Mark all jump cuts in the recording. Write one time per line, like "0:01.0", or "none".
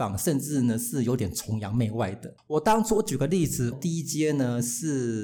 0:02.4
0:03.7

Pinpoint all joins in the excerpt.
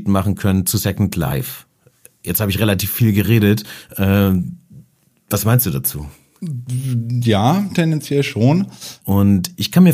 0:09.0

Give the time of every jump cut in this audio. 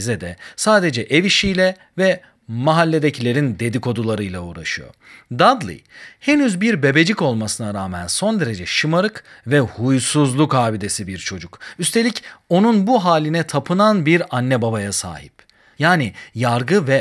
0:15.7

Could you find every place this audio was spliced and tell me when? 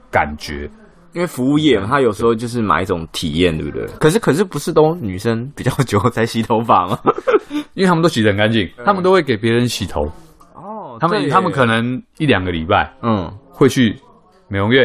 0:04.0
0:08.8

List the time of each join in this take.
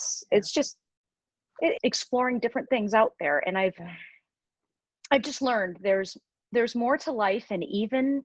0:01.7

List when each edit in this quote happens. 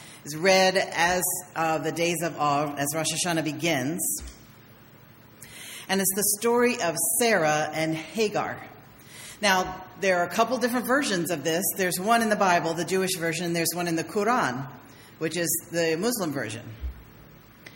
none

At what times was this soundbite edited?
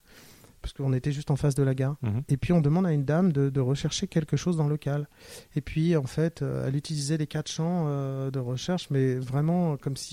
none

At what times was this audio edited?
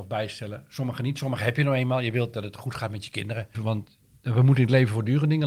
0:03.5

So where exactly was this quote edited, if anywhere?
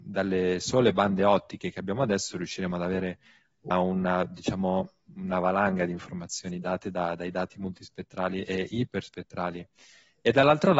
0:03.7

